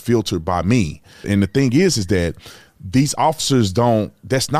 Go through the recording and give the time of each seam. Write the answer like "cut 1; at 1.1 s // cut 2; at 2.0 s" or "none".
cut 1; at 1.2 s